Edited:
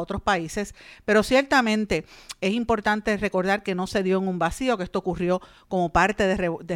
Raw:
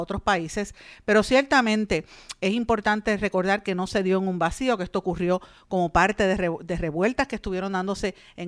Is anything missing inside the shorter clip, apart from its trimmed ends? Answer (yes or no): no